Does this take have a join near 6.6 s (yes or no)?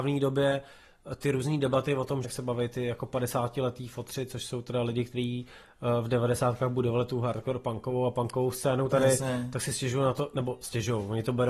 no